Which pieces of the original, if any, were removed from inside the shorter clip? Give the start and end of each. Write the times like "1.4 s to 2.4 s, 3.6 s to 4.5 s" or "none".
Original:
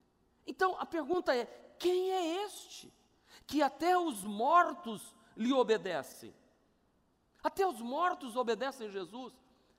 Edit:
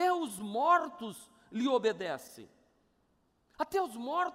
none